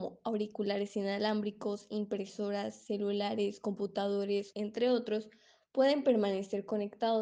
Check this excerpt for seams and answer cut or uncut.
cut